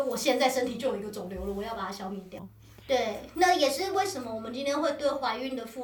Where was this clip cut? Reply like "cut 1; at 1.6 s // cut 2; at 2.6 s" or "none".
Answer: cut 1; at 2.4 s